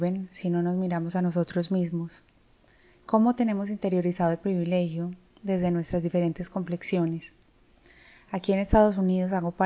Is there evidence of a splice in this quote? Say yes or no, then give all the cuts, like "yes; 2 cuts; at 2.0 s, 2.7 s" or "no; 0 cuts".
no; 0 cuts